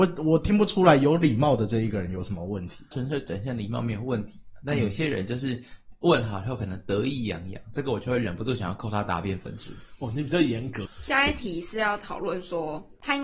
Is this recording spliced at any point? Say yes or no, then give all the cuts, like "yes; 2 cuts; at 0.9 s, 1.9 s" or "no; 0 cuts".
yes; 1 cut; at 10.9 s